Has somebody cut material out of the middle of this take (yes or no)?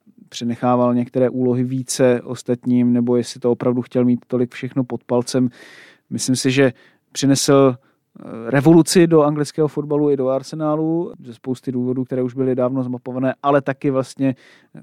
no